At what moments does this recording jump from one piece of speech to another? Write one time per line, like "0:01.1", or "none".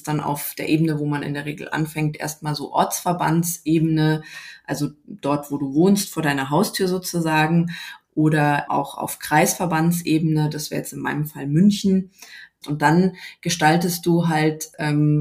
0:08.7
0:12.6